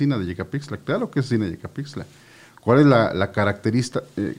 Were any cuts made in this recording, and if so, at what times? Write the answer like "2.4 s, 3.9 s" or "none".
none